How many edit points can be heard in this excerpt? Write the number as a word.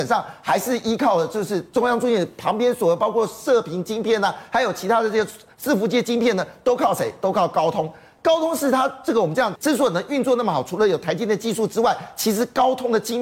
two